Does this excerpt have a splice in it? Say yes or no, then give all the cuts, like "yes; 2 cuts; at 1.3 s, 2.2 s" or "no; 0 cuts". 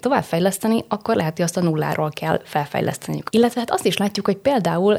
yes; 1 cut; at 3.3 s